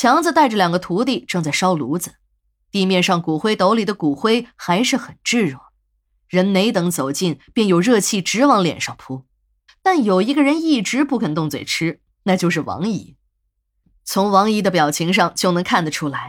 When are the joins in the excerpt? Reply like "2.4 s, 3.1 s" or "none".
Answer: 9.7 s

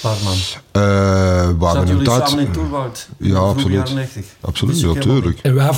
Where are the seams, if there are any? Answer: none

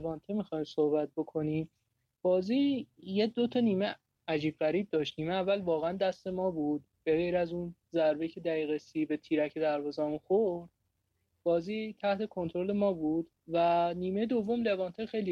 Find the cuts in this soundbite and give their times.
13.4 s

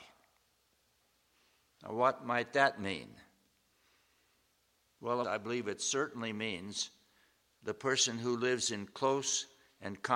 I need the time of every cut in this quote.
5.2 s

